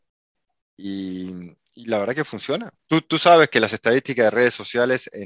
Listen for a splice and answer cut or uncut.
cut